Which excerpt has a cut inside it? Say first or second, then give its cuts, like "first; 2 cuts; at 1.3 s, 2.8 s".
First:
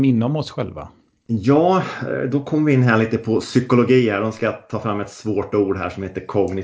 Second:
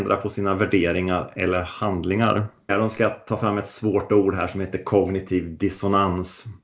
second; 1 cut; at 2.7 s